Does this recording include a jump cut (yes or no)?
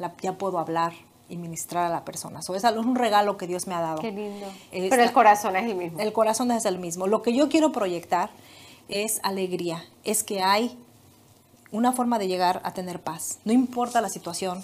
yes